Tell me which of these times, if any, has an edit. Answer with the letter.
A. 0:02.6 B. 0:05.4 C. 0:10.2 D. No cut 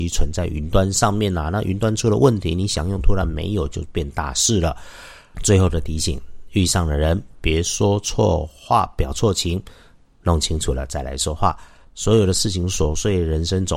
D